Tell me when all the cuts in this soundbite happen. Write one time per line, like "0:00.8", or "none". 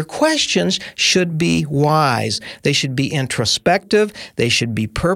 none